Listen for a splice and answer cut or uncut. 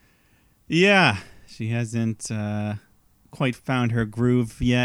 uncut